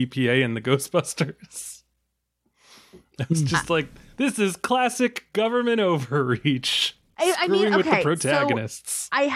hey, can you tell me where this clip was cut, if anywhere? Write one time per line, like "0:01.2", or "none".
none